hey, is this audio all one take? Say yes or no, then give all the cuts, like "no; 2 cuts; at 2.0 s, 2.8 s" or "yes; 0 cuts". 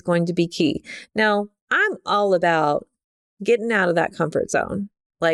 yes; 0 cuts